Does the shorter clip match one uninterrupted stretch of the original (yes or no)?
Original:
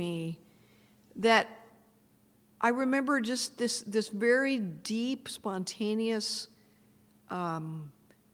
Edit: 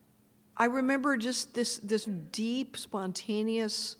no